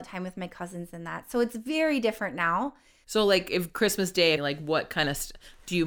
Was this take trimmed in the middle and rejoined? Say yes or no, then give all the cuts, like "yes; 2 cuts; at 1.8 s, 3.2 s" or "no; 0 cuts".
yes; 2 cuts; at 3.0 s, 4.4 s